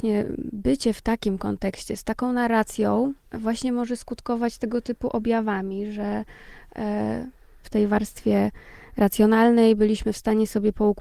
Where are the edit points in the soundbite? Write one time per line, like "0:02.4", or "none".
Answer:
0:03.2
0:07.6